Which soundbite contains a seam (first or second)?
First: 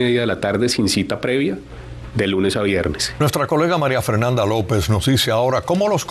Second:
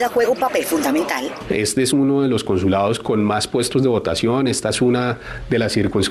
first